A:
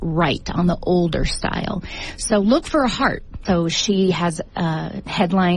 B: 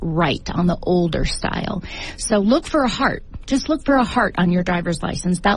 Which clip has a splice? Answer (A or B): A